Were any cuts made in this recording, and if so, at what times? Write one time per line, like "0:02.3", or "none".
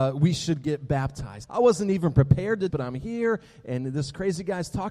0:01.4
0:02.7